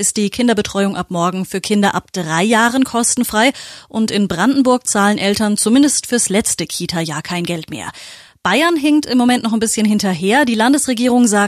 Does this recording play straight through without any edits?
yes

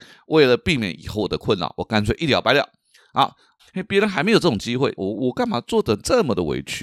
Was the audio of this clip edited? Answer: yes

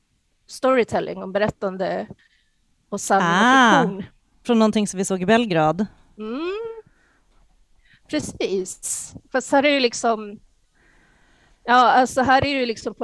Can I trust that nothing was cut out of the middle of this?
no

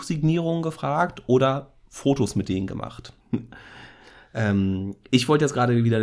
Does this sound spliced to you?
yes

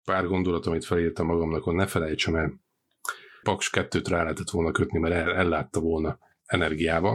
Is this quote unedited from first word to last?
no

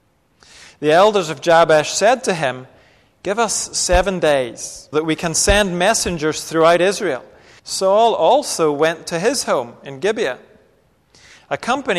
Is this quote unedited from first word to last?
no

